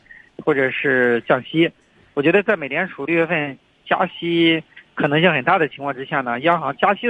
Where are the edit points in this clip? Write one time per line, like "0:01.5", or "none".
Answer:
none